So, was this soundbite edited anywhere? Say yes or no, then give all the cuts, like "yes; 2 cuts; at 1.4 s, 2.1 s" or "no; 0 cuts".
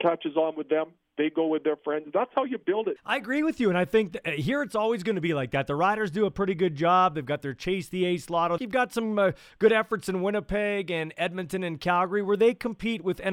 yes; 2 cuts; at 3.0 s, 8.6 s